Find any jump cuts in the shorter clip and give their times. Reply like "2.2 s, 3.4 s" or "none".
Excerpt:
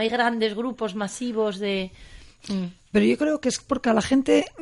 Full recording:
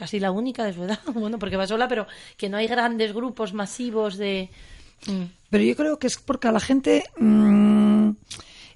none